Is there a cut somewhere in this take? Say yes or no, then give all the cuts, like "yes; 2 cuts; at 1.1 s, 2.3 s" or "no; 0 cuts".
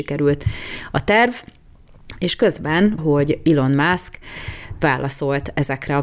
yes; 1 cut; at 3.0 s